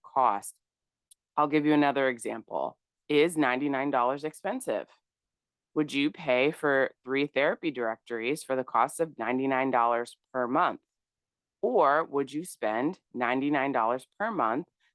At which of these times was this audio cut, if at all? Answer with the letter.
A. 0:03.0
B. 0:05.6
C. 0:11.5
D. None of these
D